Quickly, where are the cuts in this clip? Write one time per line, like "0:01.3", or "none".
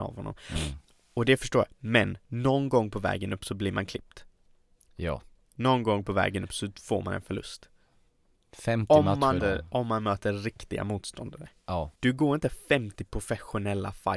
0:09.4
0:12.0